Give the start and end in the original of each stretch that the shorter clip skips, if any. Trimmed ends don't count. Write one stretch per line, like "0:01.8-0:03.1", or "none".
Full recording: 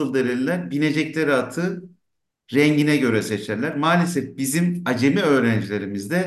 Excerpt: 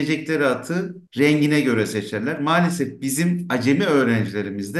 0:01.9-0:02.4